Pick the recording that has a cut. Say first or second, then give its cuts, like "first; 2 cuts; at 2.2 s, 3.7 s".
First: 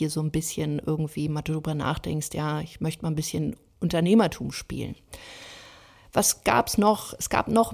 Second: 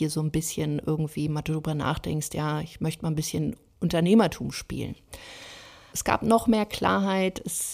second; 1 cut; at 5.9 s